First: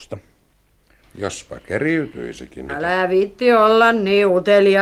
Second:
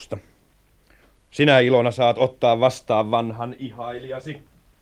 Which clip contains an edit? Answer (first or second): first